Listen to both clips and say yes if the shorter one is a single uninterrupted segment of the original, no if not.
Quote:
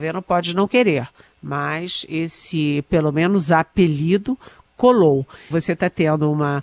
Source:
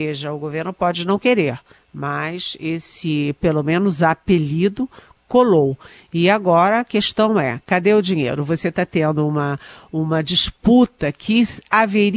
no